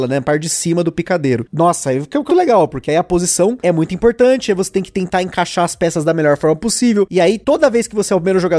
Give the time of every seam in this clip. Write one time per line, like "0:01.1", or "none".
0:02.3